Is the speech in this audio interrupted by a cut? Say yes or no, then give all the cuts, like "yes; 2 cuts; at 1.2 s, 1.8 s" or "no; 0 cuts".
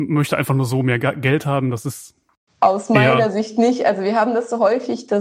no; 0 cuts